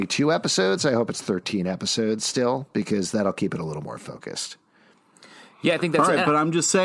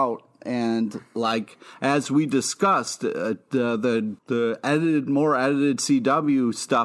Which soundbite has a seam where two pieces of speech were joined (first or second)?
second